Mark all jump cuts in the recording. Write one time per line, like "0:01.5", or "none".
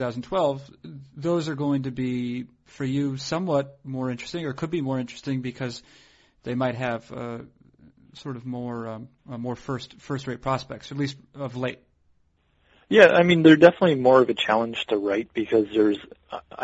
0:09.2